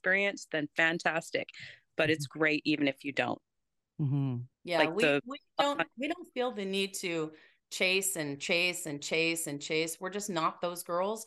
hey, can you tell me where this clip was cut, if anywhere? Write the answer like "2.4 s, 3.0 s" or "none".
4.5 s